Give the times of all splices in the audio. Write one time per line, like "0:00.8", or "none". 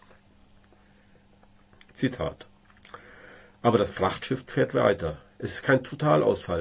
none